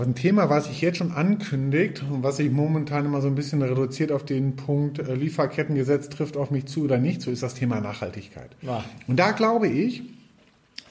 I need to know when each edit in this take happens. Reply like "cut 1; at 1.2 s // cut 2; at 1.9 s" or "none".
none